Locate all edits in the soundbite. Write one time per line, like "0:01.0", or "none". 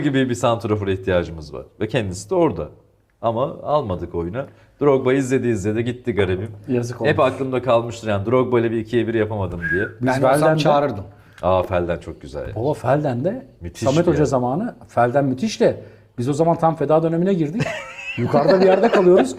none